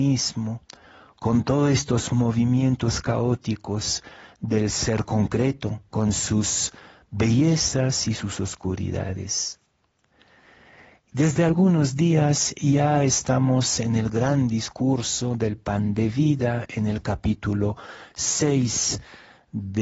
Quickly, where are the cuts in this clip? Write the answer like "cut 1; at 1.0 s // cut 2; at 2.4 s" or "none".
cut 1; at 5.9 s